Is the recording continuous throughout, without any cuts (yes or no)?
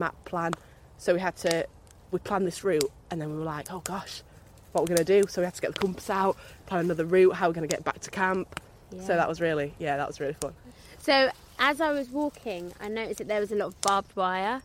yes